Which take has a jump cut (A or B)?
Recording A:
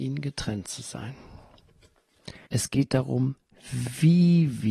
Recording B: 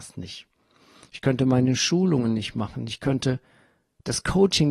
A